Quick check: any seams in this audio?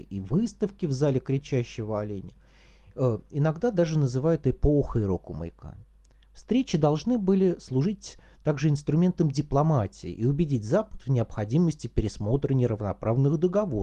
no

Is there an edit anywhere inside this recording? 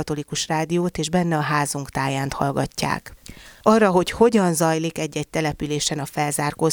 yes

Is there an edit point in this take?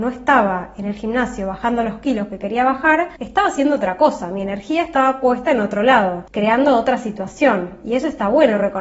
no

